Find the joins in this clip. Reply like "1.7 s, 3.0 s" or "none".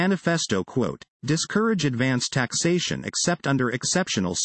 1.1 s

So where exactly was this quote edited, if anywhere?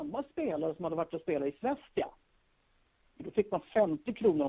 3.2 s

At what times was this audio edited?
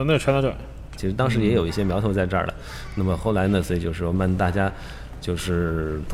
1.0 s, 4.1 s

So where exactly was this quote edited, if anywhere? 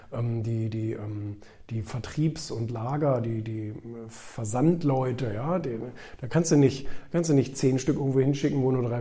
none

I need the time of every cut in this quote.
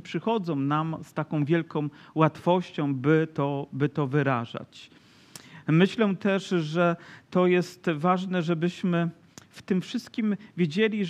none

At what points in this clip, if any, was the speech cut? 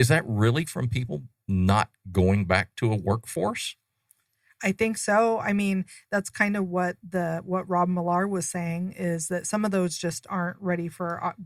none

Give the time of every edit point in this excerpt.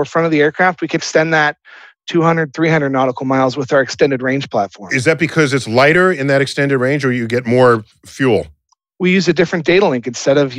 1.0 s

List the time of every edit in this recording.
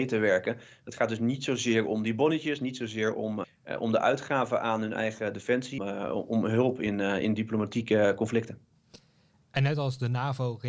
3.4 s, 5.8 s

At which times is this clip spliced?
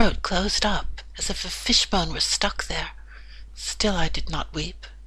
3.5 s

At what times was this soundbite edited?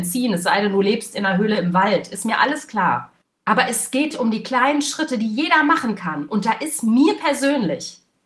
4.1 s

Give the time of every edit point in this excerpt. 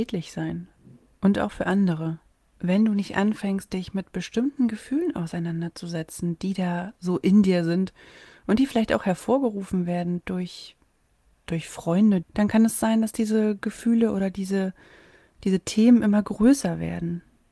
12.2 s

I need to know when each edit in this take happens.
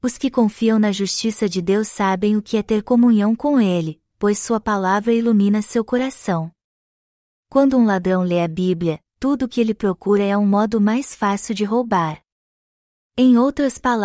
none

